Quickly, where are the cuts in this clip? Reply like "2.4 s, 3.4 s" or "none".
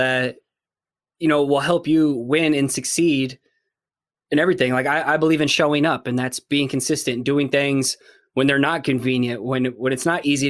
none

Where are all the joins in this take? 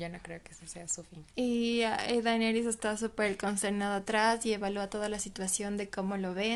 1.3 s

